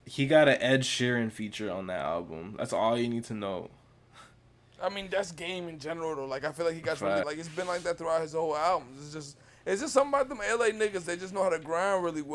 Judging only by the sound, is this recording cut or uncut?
cut